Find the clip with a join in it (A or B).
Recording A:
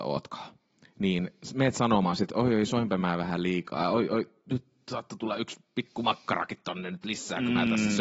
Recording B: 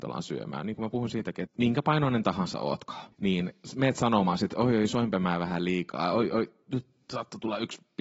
B